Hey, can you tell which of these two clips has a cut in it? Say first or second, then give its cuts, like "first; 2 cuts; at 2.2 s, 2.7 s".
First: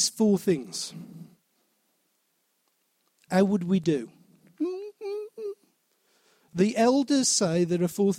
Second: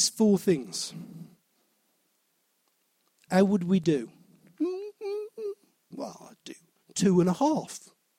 second; 1 cut; at 5.9 s